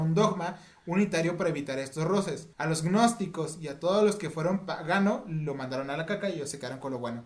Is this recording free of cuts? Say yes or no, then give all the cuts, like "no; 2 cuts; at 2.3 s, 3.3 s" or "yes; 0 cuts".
no; 1 cut; at 2.5 s